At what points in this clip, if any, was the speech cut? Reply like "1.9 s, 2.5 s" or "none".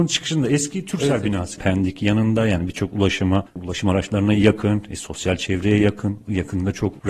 1.6 s